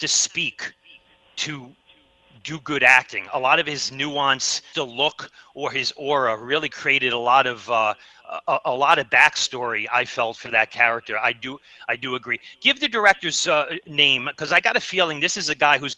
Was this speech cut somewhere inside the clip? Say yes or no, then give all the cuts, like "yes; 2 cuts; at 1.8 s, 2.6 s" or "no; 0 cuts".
yes; 1 cut; at 4.7 s